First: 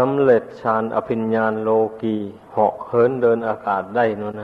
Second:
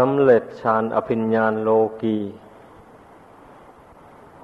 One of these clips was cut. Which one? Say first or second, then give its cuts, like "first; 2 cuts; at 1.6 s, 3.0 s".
first; 1 cut; at 2.5 s